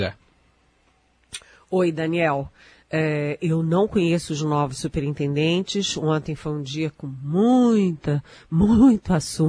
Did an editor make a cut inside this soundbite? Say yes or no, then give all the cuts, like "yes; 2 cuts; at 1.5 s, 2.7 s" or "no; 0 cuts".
no; 0 cuts